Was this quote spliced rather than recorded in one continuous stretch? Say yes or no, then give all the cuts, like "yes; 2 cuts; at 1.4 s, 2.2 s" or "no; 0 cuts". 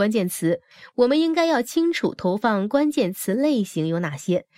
no; 0 cuts